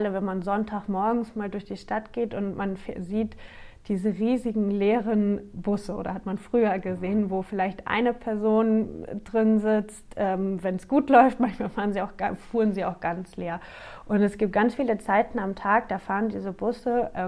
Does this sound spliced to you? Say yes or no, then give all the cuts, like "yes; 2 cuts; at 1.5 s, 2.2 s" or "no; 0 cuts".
no; 0 cuts